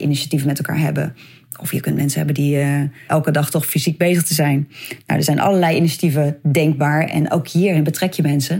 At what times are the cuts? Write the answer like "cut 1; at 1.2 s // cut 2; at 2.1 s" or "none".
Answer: cut 1; at 3.1 s